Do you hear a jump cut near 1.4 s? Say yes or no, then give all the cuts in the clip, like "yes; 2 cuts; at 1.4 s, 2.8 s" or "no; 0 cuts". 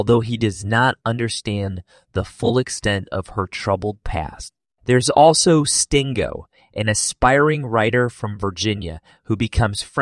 no; 1 cut; at 4.8 s